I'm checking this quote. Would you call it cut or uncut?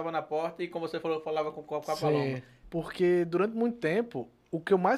cut